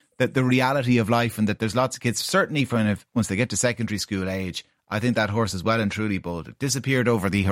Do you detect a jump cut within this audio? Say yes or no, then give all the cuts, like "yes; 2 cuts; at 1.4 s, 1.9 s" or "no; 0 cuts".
no; 0 cuts